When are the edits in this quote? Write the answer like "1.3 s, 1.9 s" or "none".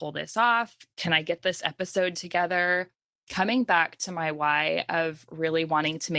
none